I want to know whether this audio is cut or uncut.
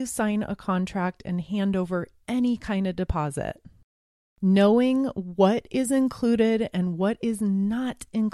uncut